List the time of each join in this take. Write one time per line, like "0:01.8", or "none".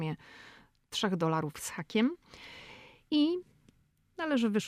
0:03.1

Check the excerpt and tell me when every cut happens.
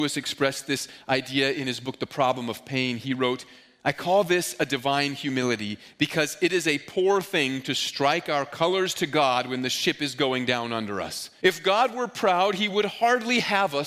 0:11.4

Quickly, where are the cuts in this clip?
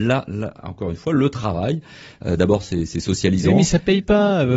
none

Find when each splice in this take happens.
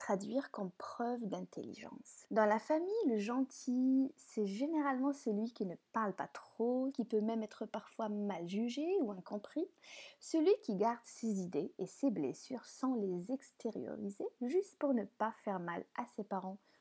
0:02.2
0:06.9

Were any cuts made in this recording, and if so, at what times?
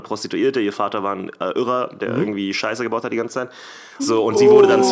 0:04.0

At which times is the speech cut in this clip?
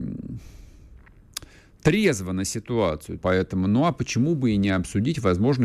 0:03.2

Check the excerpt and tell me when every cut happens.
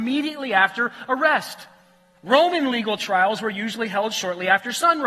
0:02.1

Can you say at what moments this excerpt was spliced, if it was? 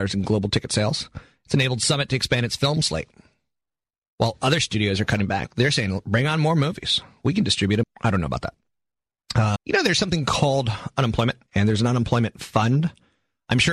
0:07.8
0:09.6
0:11.5

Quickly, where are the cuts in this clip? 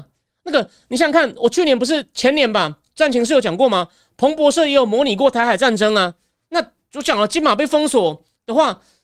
none

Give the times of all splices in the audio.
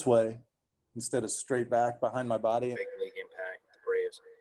0:02.7

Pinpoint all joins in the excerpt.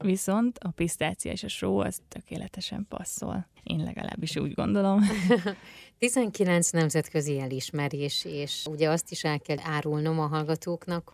0:03.6

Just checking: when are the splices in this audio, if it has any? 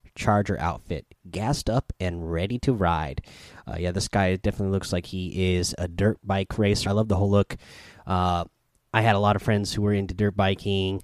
0:06.9
0:08.8

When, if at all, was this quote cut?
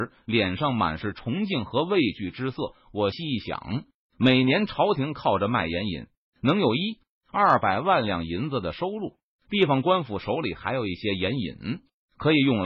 0:03.1

